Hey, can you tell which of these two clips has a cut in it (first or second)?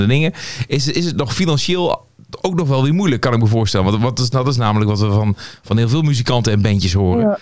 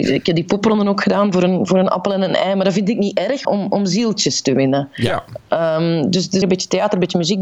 second